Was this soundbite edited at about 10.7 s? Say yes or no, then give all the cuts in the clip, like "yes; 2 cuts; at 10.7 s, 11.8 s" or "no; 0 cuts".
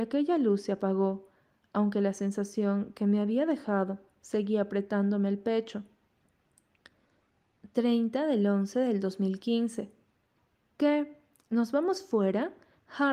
yes; 1 cut; at 10.7 s